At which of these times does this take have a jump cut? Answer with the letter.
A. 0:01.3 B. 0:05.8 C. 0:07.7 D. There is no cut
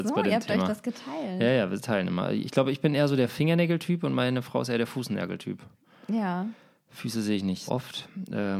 C